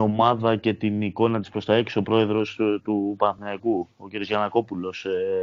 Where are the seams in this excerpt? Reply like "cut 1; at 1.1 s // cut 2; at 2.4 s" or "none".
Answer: none

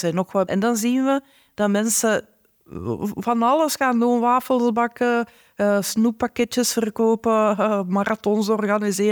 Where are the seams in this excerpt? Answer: none

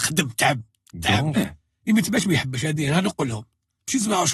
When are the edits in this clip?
cut 1; at 1.3 s

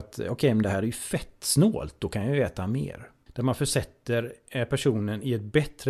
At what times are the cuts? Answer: cut 1; at 3.3 s

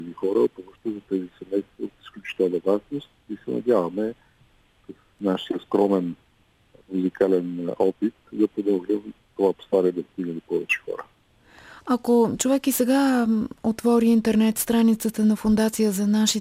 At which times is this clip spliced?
none

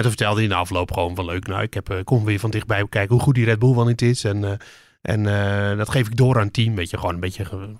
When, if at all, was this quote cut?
none

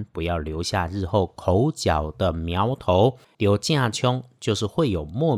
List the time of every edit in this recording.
cut 1; at 3.3 s

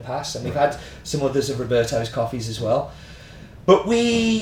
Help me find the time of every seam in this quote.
none

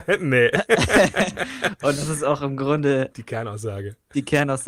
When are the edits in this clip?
cut 1; at 3.1 s

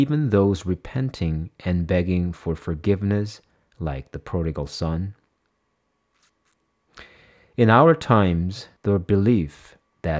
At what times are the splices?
cut 1; at 8.8 s

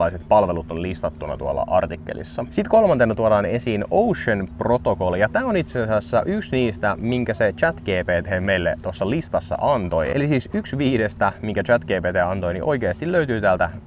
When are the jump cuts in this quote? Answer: none

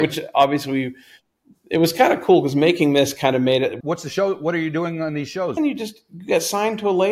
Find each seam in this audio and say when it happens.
cut 1; at 3.8 s // cut 2; at 5.6 s

